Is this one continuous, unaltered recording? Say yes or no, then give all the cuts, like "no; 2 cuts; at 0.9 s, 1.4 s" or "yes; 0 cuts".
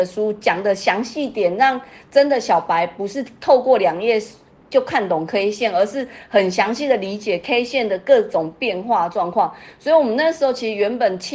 yes; 0 cuts